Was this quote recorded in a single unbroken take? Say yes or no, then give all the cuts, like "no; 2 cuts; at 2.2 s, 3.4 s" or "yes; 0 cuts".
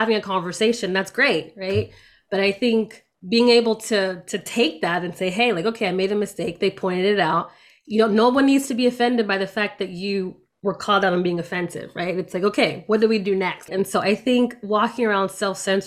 no; 1 cut; at 13.7 s